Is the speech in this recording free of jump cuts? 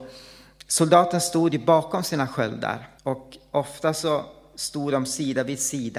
no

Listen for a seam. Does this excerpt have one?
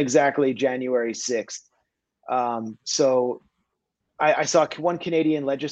no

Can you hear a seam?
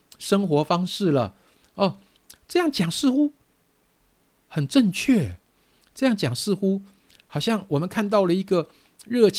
no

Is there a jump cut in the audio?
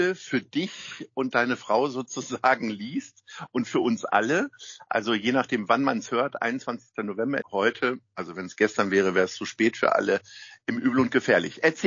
yes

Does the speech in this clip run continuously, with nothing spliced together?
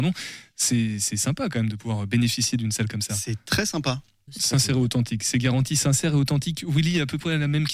no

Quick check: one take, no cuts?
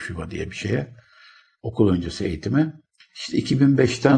no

